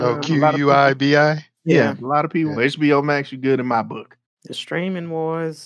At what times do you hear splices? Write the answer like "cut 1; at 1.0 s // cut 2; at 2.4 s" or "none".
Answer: cut 1; at 2.6 s // cut 2; at 4.3 s